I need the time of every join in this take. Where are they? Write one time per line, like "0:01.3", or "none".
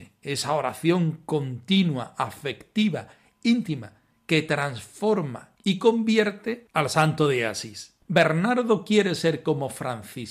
none